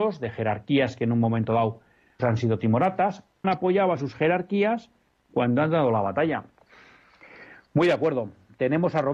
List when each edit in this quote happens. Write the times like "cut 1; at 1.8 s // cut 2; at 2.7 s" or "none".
cut 1; at 2.2 s // cut 2; at 3.4 s